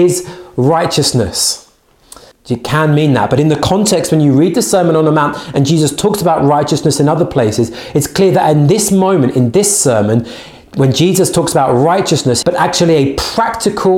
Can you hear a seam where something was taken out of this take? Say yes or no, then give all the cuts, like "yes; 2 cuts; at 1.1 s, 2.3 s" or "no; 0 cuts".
yes; 2 cuts; at 2.3 s, 12.4 s